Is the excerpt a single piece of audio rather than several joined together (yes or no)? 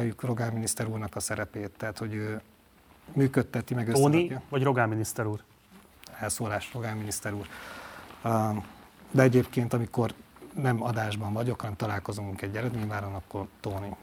yes